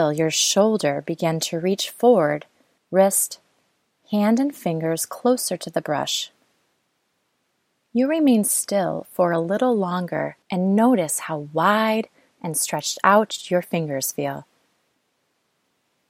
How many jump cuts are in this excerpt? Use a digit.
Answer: 3